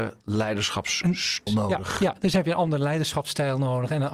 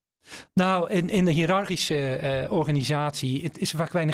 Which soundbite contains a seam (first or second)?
first